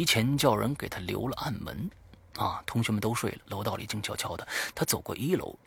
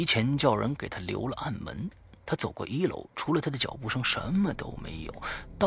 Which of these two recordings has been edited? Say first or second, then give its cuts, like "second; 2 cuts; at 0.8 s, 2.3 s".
second; 1 cut; at 2.2 s